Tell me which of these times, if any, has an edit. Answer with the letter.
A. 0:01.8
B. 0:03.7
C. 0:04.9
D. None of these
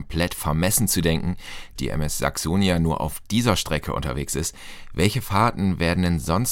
A